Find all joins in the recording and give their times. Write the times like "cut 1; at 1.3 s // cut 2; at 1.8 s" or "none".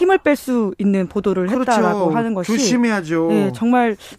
none